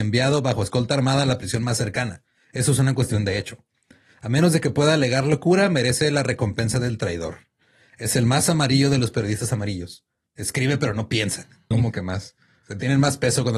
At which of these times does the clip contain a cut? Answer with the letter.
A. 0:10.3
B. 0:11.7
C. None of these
B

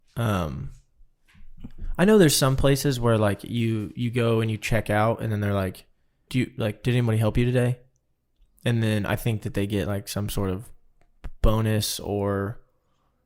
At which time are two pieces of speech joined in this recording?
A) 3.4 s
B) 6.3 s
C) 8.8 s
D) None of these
B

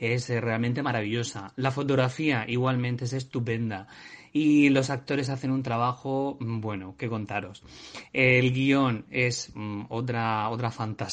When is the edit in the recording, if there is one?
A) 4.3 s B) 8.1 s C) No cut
C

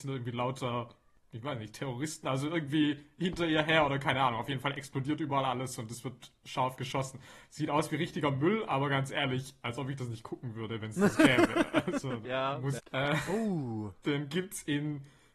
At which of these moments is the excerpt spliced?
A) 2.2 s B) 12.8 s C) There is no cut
B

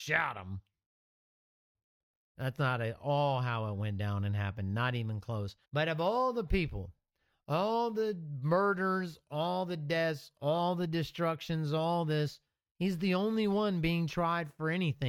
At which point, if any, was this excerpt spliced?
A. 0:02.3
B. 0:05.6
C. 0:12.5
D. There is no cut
B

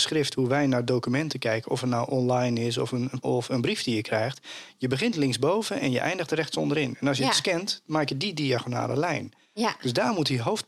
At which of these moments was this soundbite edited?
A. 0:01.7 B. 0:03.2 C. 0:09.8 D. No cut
B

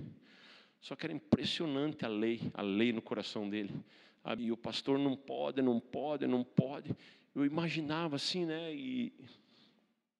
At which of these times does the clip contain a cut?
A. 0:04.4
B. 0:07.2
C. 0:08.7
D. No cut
A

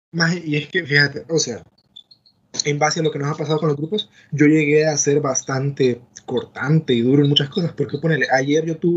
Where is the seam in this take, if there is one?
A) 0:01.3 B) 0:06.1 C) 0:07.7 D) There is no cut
A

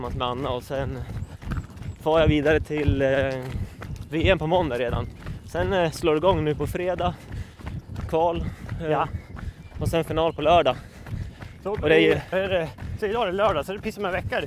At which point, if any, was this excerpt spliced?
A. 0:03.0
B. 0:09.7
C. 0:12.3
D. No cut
C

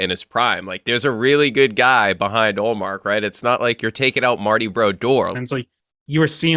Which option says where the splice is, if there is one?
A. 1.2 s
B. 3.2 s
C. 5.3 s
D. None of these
C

